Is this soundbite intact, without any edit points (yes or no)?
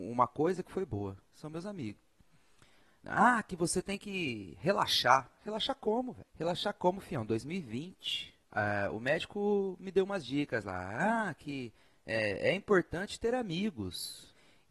no